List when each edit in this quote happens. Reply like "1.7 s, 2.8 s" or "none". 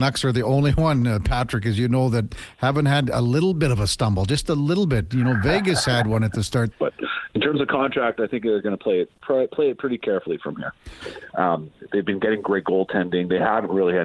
6.7 s, 11.3 s